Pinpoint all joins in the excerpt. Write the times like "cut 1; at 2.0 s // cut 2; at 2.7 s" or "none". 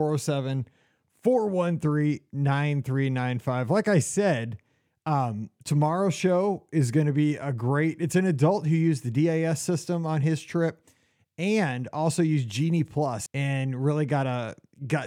cut 1; at 13.3 s